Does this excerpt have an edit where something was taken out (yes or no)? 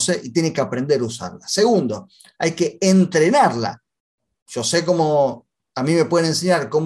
no